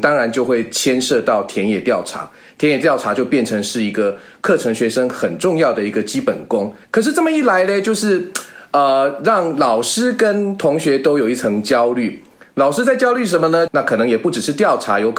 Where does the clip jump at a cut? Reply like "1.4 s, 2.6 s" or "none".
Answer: 6.8 s, 13.7 s